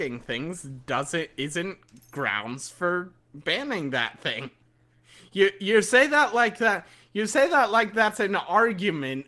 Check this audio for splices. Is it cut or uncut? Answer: uncut